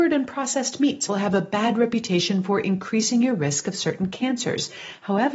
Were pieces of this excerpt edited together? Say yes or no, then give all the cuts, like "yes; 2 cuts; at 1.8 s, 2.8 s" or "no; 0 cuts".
yes; 1 cut; at 1.1 s